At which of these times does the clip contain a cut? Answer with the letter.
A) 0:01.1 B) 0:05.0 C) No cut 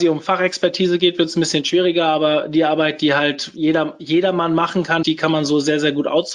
B